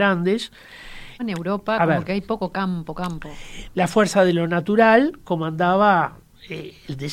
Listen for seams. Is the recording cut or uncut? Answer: cut